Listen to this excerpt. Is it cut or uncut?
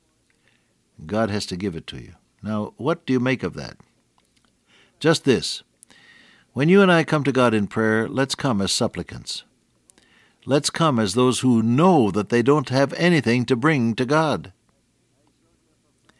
uncut